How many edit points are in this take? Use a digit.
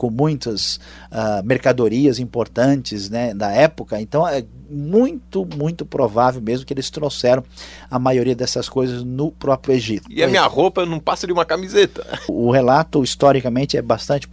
2